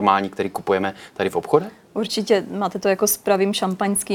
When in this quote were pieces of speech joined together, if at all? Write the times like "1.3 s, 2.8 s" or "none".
none